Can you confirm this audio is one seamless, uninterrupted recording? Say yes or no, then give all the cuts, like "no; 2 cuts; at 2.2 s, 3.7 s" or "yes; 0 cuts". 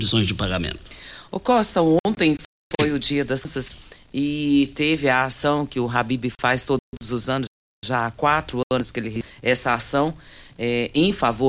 yes; 0 cuts